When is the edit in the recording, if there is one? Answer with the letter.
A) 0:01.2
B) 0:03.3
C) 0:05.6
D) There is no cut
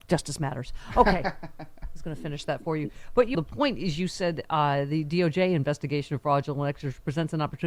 B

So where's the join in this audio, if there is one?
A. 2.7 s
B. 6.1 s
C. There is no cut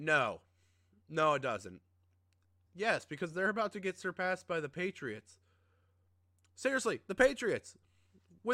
A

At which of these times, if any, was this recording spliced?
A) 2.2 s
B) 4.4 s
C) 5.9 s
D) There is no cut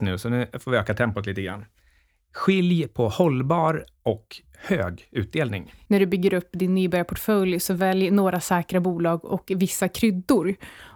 C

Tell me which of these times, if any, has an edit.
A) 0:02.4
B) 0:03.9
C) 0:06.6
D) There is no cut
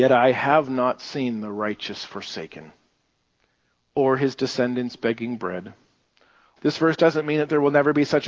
C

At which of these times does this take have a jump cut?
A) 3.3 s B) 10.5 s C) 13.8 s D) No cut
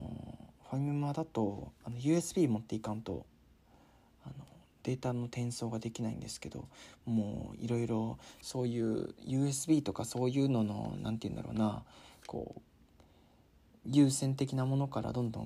C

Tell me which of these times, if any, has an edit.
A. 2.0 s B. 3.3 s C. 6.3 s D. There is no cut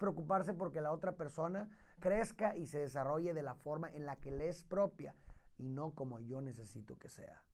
A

